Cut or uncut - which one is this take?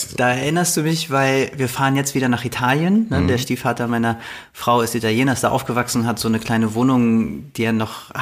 uncut